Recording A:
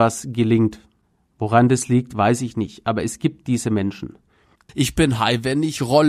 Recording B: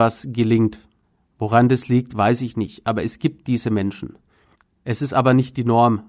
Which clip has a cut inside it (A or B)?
A